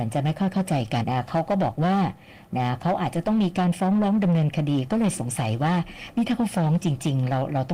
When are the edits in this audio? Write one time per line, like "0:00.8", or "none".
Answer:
0:01.0